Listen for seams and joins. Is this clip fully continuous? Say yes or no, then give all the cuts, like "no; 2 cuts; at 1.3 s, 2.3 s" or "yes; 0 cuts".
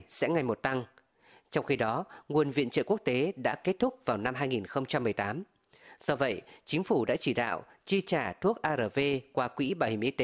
yes; 0 cuts